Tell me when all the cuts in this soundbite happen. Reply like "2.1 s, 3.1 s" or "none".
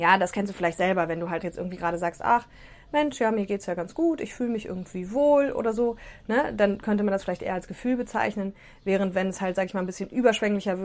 1.4 s